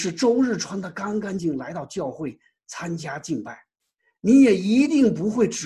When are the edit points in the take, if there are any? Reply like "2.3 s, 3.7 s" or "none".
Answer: 1.4 s